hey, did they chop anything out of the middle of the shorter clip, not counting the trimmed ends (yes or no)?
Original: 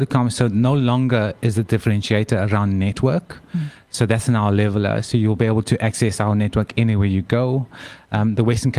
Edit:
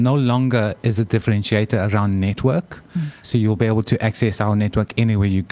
yes